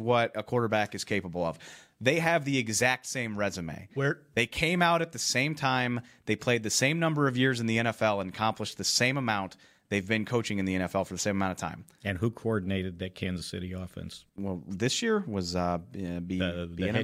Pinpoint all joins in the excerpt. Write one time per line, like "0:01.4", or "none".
0:14.3